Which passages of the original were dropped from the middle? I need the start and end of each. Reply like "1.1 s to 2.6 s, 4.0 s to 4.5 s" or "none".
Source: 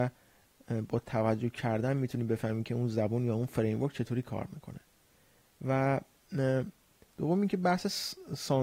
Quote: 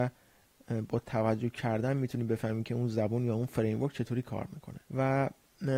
4.9 s to 5.6 s